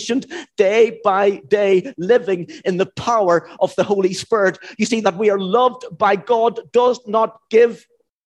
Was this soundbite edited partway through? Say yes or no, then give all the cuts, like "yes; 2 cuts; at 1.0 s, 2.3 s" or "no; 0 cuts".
yes; 1 cut; at 5.0 s